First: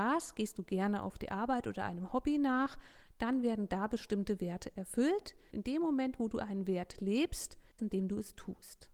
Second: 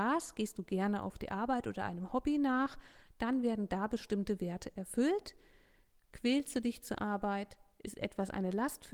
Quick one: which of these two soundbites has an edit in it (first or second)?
first